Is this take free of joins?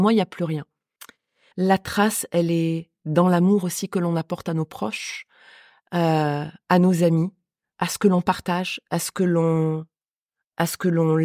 no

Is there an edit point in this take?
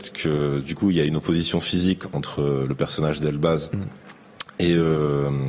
no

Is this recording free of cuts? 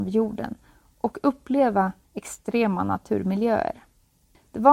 no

